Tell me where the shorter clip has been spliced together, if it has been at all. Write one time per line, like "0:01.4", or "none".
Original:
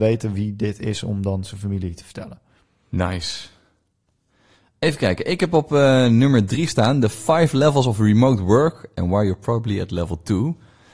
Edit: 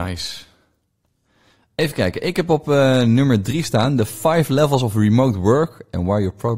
none